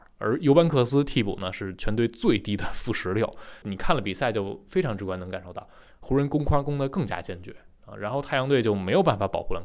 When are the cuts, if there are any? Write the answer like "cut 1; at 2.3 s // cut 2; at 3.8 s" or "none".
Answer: cut 1; at 3.6 s // cut 2; at 5.9 s